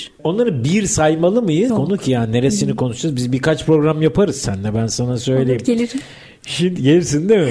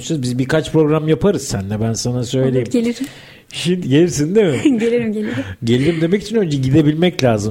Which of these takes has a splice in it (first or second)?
first